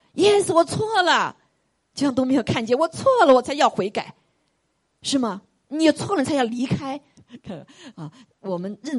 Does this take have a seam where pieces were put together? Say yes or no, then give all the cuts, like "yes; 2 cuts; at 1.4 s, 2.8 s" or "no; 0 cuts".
yes; 1 cut; at 7.2 s